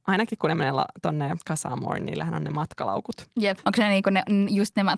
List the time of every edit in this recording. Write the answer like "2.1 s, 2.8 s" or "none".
3.6 s